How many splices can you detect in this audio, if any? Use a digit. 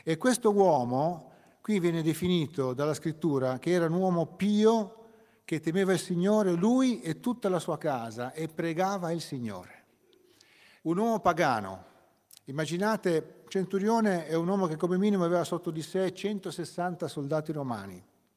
1